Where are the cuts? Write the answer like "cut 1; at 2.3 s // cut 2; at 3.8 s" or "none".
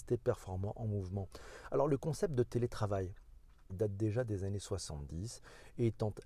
cut 1; at 3.7 s